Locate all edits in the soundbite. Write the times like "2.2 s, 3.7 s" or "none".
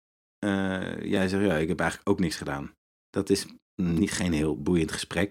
none